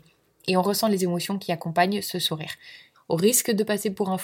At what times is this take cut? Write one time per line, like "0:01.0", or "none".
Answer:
0:02.9